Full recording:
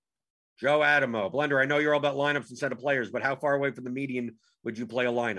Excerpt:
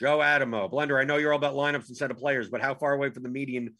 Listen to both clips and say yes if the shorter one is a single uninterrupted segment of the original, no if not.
yes